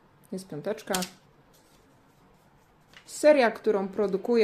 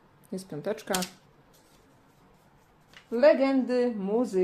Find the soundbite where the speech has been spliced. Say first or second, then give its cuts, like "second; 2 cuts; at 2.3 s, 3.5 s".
first; 1 cut; at 3.0 s